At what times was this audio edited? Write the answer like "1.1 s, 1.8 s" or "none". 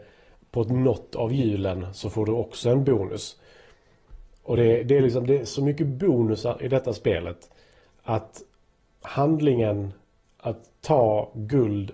none